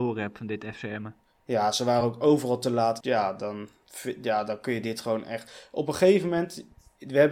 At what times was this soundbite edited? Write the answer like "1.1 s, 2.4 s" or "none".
3.0 s